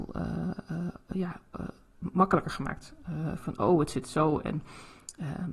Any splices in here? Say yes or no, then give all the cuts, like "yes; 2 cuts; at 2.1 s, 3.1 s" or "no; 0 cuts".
no; 0 cuts